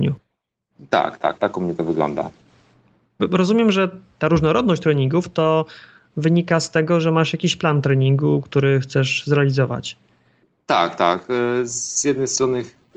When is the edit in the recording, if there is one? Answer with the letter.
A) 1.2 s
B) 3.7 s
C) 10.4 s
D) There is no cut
D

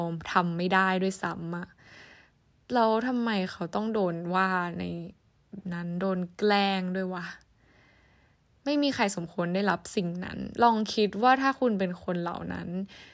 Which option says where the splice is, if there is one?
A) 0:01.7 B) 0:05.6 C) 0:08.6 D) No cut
B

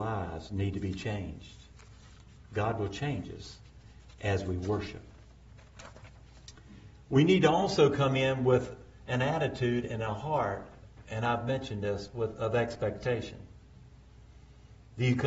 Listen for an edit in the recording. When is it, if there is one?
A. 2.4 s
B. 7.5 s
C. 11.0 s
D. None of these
D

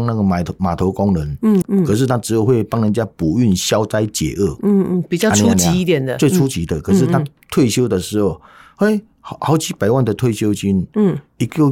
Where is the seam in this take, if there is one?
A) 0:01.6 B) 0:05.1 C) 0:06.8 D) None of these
A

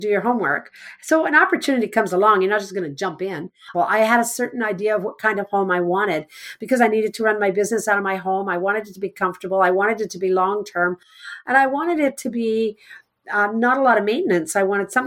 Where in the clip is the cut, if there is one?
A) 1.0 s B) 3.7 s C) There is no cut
B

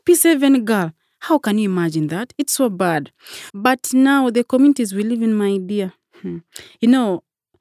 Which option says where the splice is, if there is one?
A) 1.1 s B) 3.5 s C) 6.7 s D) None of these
B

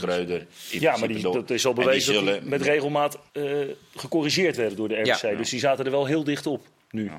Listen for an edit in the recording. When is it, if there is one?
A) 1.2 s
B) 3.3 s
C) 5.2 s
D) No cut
B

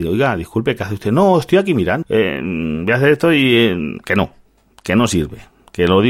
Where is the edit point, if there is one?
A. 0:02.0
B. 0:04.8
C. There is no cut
A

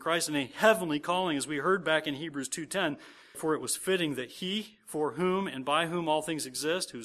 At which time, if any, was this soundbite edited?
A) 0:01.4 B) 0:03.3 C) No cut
B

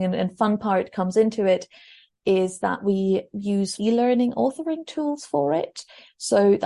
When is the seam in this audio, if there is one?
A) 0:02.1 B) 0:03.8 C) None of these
B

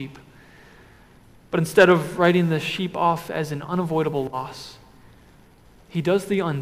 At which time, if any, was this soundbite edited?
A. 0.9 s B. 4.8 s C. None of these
C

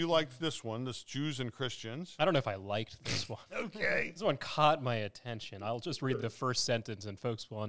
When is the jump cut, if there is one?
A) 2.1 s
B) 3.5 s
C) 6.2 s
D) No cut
D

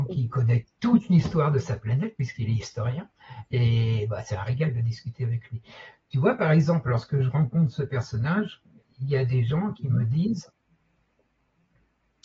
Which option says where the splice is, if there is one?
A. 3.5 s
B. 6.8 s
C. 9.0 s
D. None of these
D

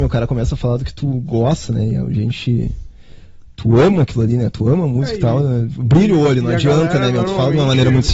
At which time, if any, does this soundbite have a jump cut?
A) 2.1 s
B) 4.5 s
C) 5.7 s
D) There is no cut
D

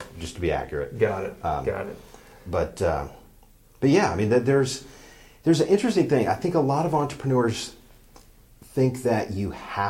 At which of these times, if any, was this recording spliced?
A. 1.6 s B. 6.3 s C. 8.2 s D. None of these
D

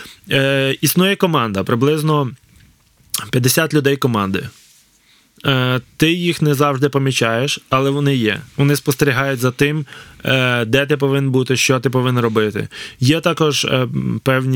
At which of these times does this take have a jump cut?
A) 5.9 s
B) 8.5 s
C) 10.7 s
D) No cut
B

